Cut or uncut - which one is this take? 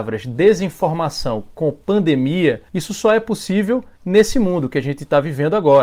cut